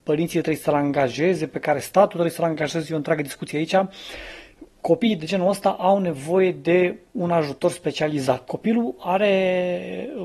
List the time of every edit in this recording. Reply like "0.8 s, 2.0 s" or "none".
8.5 s